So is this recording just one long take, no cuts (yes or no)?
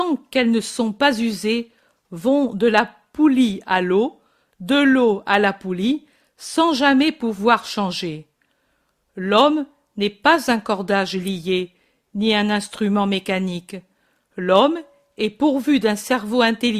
yes